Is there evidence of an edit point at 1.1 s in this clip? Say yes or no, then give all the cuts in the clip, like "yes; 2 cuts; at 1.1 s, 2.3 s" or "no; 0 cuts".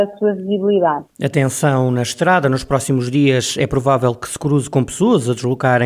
no; 0 cuts